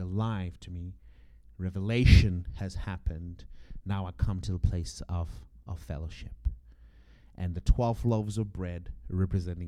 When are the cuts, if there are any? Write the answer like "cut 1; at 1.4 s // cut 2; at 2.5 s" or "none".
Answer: none